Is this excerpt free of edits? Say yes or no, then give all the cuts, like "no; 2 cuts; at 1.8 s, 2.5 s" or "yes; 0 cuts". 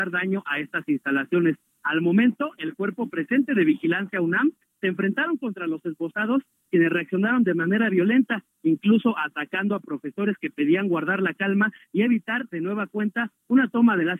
yes; 0 cuts